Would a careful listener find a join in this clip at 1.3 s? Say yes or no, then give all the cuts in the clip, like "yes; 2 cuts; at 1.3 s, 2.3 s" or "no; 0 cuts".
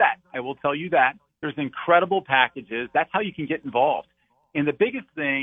yes; 1 cut; at 1.3 s